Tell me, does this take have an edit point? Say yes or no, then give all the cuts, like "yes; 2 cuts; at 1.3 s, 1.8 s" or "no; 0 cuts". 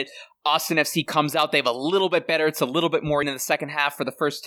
yes; 1 cut; at 3.2 s